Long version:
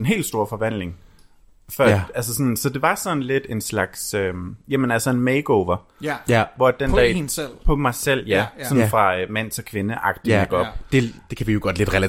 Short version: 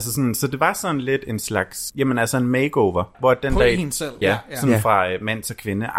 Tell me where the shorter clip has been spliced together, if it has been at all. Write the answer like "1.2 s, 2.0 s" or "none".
1.9 s, 3.1 s, 4.2 s